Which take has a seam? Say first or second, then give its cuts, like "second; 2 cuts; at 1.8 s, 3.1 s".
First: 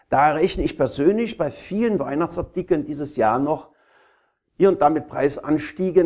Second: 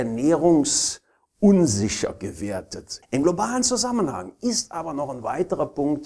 second; 1 cut; at 3.0 s